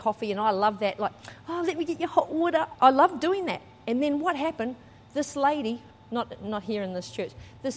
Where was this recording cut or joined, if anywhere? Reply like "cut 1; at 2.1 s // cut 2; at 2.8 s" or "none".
cut 1; at 2.8 s // cut 2; at 5.9 s